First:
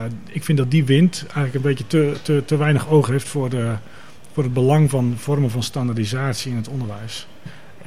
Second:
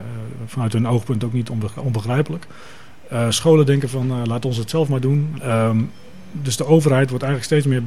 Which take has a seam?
second; 1 cut; at 5.4 s

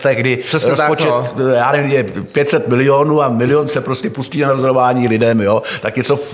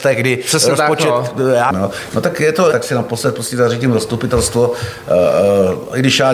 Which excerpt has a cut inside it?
second; 2 cuts; at 1.7 s, 2.7 s

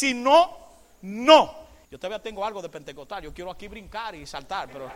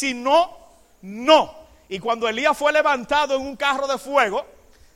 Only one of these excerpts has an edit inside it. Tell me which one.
first; 1 cut; at 1.8 s

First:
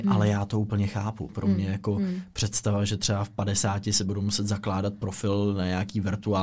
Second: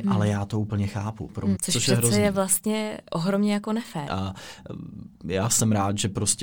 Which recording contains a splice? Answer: second; 2 cuts; at 1.6 s, 4.1 s

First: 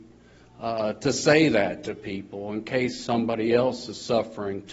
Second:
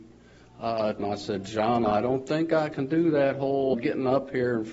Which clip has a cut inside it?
second; 2 cuts; at 1.0 s, 3.7 s

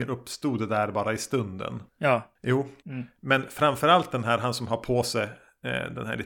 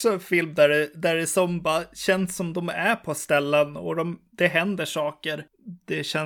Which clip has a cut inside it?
first; 1 cut; at 2.8 s

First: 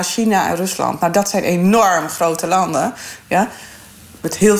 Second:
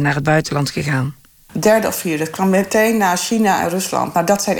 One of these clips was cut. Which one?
second; 1 cut; at 1.5 s

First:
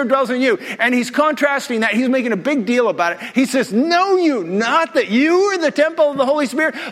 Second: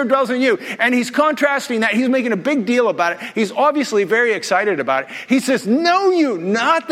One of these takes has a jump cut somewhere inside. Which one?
first; 1 cut; at 3.3 s

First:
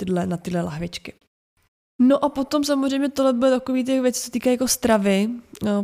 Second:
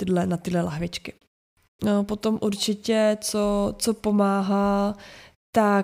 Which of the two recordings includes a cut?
second; 1 cut; at 1.8 s

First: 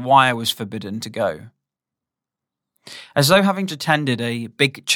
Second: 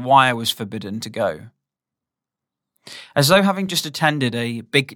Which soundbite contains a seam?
first; 1 cut; at 3.7 s

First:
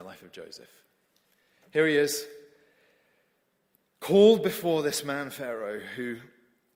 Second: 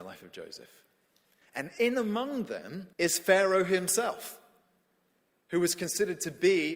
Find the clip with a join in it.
second; 2 cuts; at 1.4 s, 2.9 s

